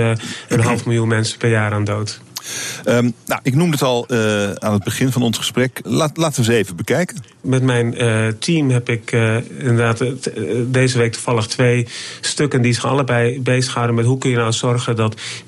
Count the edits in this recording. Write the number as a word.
two